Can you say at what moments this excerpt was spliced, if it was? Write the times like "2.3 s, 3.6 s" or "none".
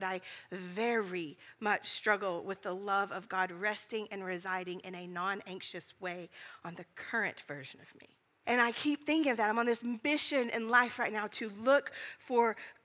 8.4 s